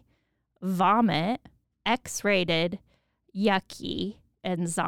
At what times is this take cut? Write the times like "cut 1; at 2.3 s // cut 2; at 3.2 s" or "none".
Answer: cut 1; at 1.6 s